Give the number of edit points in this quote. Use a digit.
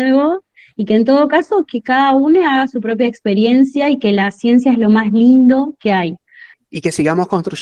1